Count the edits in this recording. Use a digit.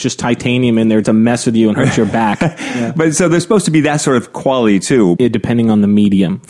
2